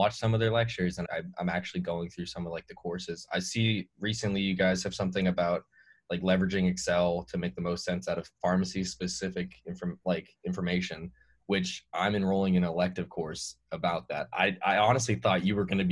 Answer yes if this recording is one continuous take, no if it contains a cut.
no